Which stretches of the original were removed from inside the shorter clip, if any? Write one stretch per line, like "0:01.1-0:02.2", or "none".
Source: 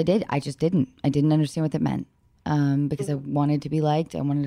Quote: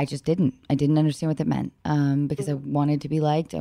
0:02.1-0:02.4